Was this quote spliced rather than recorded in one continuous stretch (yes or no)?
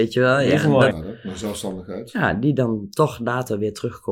yes